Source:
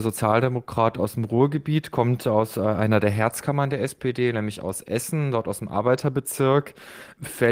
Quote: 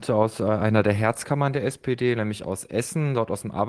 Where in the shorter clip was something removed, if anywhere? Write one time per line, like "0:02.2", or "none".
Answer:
none